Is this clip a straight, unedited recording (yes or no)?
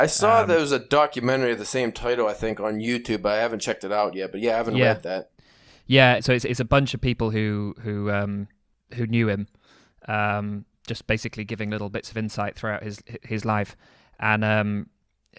no